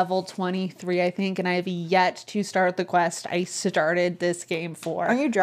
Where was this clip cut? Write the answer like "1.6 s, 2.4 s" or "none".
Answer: none